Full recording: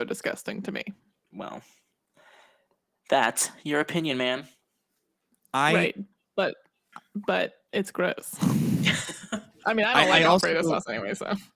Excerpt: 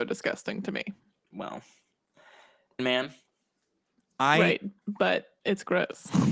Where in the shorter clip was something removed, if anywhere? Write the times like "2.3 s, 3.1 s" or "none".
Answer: 2.8 s, 4.8 s